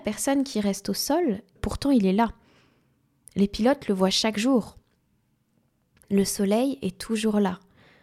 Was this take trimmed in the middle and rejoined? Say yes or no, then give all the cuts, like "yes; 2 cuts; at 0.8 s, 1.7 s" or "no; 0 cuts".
yes; 1 cut; at 1.6 s